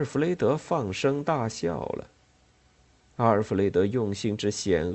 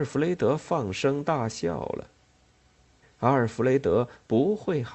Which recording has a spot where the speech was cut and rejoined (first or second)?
second